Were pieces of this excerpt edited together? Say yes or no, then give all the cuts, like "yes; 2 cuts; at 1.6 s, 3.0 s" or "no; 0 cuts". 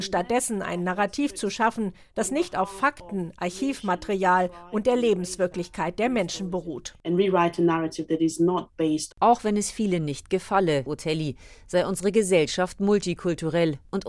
yes; 2 cuts; at 9.1 s, 10.9 s